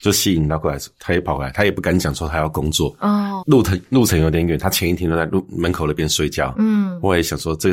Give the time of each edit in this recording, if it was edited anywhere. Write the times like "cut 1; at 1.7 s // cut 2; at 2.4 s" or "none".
cut 1; at 3.4 s